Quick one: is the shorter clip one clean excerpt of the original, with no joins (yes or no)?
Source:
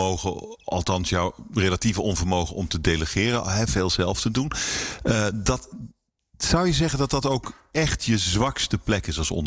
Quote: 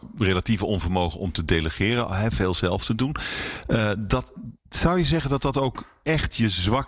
no